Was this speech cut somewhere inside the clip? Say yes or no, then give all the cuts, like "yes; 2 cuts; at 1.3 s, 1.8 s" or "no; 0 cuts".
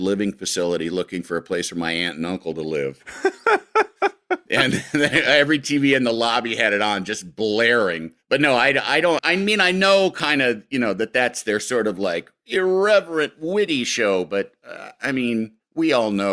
yes; 1 cut; at 9.2 s